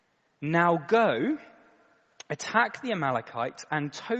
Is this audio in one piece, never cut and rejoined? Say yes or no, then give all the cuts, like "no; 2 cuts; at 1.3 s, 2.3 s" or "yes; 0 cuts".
yes; 0 cuts